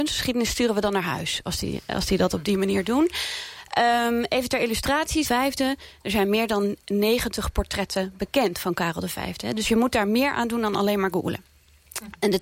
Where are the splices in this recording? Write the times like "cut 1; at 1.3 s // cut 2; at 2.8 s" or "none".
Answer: cut 1; at 5.2 s